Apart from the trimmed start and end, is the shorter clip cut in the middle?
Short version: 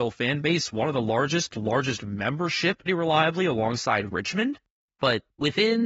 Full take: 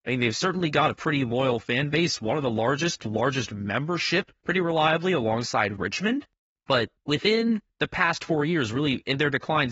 yes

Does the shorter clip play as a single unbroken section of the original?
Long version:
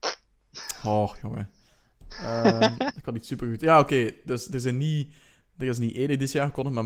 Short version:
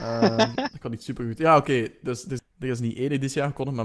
no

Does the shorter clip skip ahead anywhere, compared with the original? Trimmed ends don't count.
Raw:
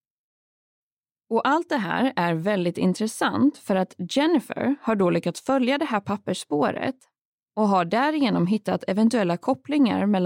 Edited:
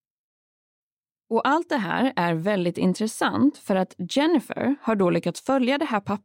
no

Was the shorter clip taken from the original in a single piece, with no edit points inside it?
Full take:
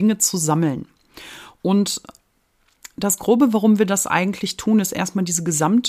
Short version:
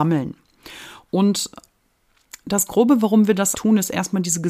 no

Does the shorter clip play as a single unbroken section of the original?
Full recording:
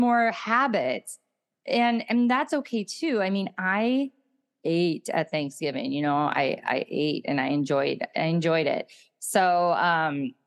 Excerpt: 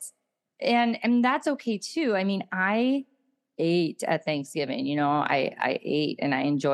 yes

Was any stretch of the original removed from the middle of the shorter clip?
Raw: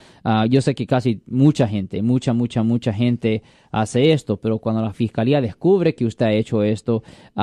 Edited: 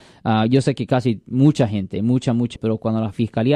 yes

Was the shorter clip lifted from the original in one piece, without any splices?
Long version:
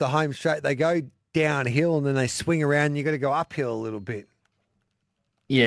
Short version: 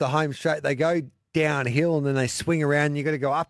yes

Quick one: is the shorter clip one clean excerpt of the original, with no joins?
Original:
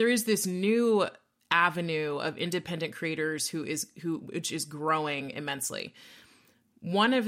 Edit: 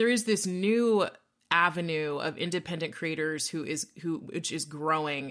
yes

